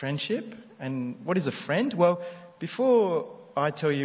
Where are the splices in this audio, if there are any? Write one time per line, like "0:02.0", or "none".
none